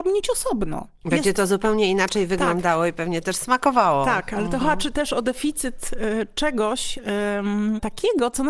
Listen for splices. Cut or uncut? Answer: uncut